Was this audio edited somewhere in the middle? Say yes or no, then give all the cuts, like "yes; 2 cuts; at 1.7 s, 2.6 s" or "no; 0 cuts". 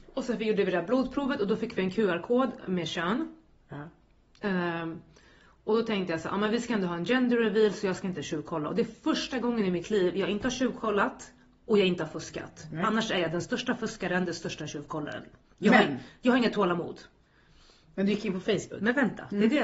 no; 0 cuts